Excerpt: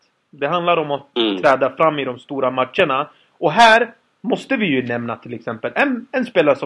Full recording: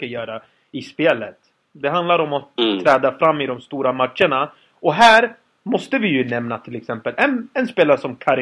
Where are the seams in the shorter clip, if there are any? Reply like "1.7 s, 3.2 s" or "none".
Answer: none

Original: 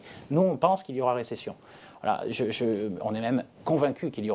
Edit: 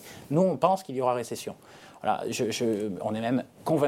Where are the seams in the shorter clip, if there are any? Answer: none

